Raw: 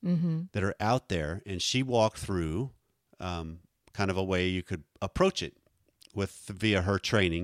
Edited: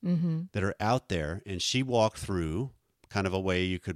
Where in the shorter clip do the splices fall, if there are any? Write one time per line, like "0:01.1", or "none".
0:02.9